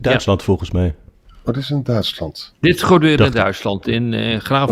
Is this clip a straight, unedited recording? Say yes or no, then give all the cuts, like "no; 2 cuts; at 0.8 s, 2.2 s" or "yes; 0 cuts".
yes; 0 cuts